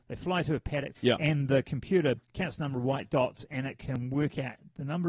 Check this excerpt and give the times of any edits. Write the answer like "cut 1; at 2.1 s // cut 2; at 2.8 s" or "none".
cut 1; at 0.9 s // cut 2; at 2.2 s